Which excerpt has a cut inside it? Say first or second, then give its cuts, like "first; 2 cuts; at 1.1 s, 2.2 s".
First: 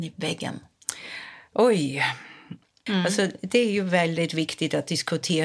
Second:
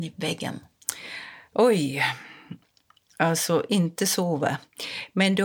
first; 1 cut; at 2.9 s